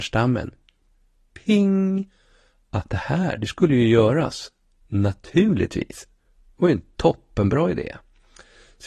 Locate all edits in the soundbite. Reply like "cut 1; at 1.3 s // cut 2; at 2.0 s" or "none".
none